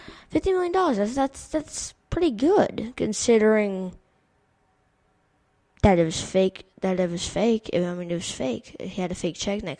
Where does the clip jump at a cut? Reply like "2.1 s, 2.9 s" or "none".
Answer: none